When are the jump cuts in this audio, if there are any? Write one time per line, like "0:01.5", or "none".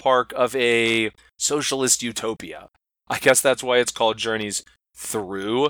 0:02.9